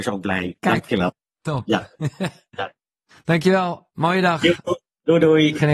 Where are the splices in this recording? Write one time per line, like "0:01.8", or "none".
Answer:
none